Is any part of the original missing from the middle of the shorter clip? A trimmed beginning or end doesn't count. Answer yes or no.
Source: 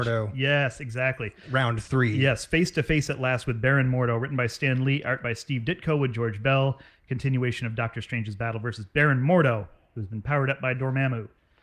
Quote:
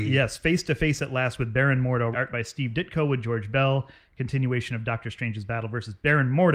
yes